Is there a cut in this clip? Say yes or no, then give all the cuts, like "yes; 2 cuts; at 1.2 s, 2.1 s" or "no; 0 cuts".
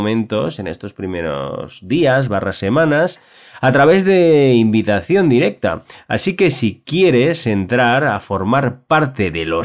no; 0 cuts